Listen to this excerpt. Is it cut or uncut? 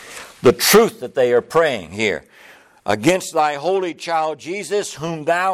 uncut